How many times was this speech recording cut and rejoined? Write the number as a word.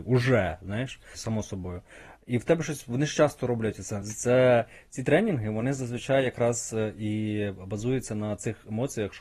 two